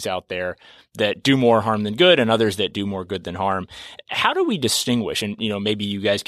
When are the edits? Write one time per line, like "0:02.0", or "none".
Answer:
none